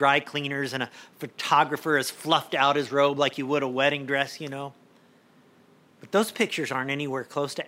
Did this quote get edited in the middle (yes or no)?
no